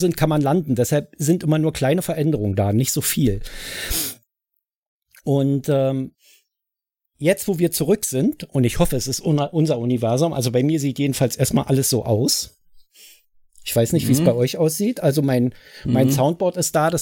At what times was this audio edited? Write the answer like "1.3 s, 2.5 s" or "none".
none